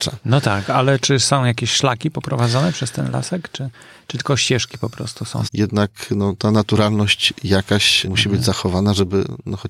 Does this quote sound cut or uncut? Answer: cut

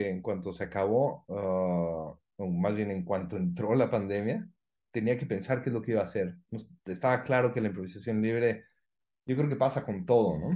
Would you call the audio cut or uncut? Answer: uncut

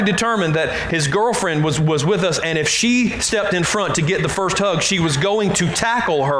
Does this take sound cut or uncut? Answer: uncut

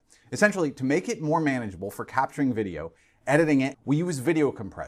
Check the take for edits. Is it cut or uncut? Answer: cut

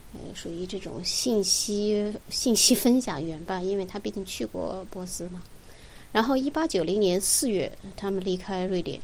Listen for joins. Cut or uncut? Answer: uncut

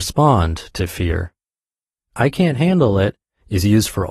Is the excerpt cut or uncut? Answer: uncut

